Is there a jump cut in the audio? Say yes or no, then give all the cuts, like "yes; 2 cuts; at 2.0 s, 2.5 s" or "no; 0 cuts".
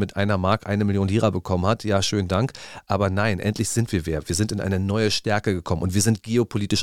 no; 0 cuts